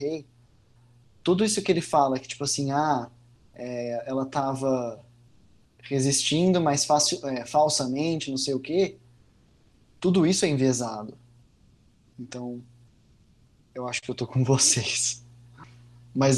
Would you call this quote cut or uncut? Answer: cut